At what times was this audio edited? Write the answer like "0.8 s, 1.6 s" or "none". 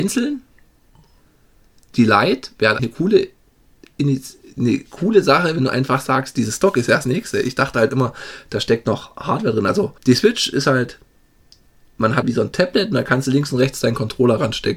2.8 s, 10.0 s, 12.2 s